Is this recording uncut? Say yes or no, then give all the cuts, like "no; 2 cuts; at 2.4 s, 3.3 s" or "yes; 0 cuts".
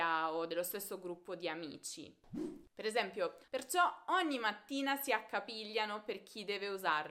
no; 1 cut; at 3.5 s